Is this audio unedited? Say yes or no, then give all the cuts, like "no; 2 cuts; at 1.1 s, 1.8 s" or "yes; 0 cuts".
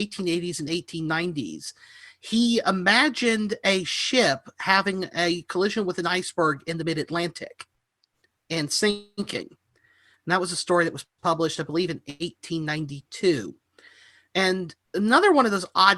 yes; 0 cuts